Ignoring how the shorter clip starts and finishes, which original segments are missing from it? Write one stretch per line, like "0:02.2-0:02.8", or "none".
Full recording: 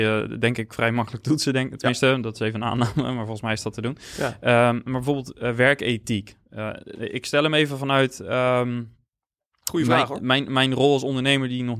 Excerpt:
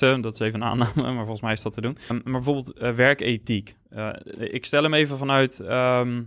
0:04.1-0:04.7